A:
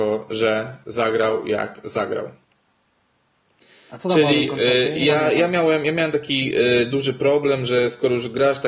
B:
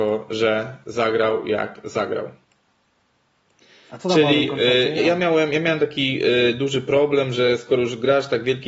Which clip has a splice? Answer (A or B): B